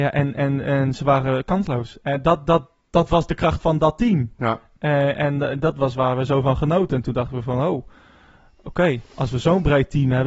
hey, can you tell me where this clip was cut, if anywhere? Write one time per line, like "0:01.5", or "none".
none